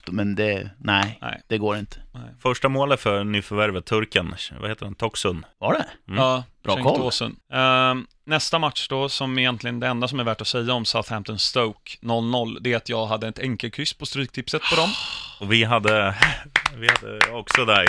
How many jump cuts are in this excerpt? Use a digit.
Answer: 2